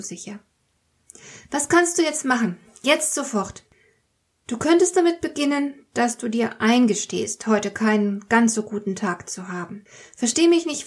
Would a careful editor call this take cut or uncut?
uncut